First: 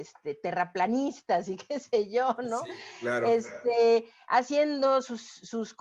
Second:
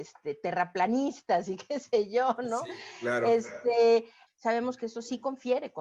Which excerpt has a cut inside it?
second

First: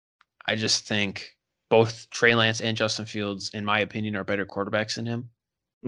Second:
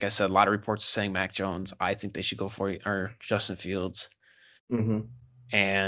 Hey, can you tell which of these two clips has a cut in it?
second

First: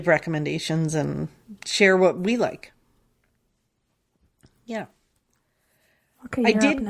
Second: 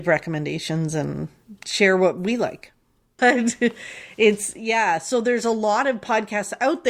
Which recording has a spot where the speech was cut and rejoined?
second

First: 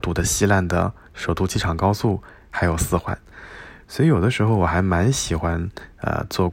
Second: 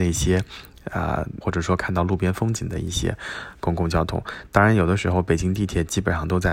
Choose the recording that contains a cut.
second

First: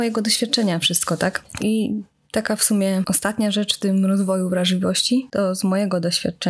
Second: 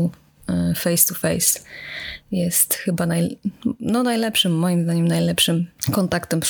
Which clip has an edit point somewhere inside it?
first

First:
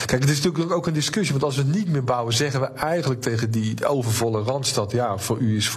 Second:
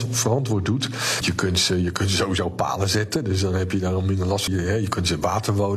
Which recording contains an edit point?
second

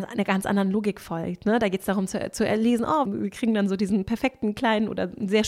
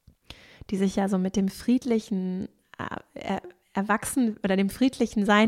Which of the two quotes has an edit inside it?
first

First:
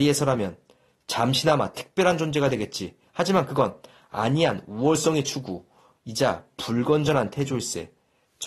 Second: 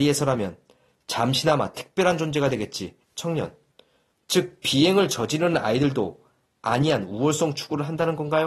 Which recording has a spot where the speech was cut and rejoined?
second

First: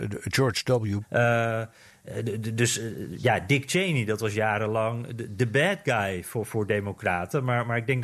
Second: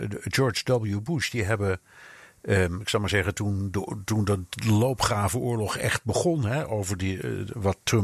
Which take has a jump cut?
first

